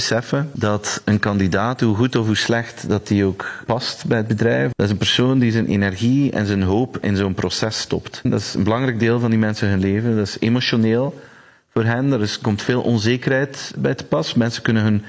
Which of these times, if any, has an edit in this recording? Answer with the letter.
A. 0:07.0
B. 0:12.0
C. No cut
A